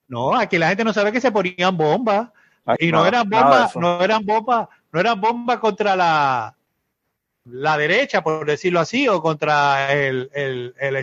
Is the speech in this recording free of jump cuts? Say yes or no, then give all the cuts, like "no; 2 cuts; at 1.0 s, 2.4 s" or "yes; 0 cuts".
no; 1 cut; at 2.8 s